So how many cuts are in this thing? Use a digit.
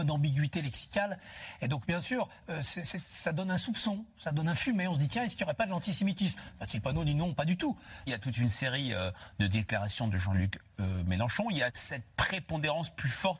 2